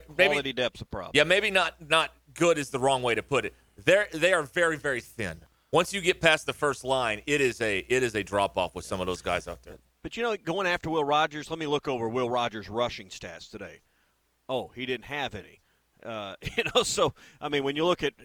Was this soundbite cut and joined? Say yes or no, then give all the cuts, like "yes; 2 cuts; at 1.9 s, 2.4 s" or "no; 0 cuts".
no; 0 cuts